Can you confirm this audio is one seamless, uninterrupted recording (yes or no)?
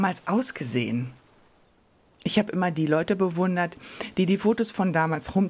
yes